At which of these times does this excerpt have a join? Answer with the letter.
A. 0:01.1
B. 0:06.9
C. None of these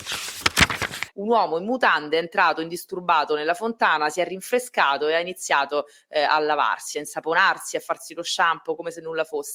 A